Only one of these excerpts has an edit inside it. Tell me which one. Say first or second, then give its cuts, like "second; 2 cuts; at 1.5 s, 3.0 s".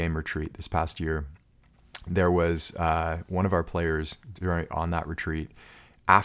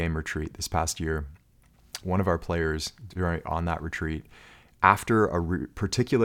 second; 1 cut; at 2.0 s